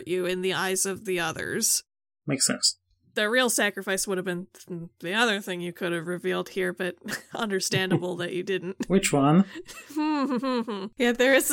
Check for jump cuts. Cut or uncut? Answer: uncut